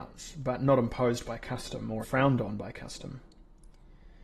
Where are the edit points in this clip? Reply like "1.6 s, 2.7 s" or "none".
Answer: 2.0 s